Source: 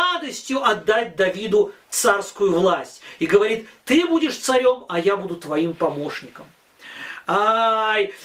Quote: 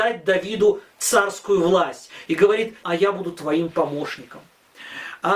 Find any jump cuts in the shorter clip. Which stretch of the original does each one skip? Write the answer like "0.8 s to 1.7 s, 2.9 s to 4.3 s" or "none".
3.7 s to 4.9 s